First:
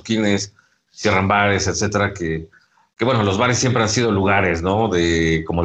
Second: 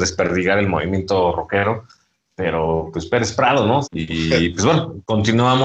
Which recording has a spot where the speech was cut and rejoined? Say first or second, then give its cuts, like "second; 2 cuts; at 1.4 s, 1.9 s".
second; 1 cut; at 3.8 s